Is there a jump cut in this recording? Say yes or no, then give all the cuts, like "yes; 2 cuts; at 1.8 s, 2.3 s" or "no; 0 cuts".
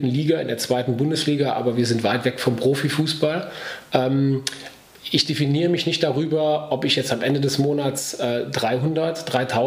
no; 0 cuts